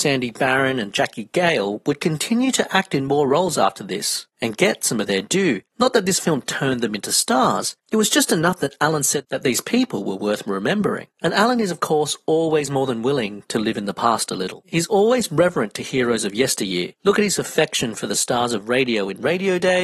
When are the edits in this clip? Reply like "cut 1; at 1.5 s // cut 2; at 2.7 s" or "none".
none